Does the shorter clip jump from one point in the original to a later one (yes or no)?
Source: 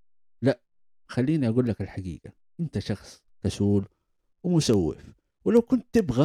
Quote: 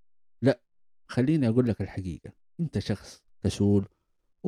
no